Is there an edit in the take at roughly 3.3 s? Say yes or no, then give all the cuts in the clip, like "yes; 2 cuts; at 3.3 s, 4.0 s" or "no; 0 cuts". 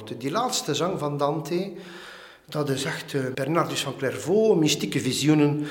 yes; 1 cut; at 3.3 s